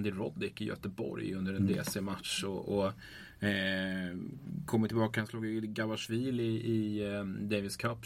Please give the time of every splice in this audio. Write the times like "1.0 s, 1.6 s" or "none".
none